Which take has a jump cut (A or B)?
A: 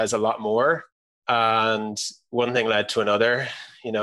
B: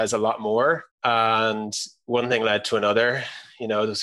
B